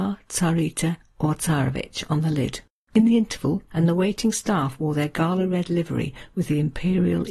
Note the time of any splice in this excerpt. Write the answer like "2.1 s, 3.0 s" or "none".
3.7 s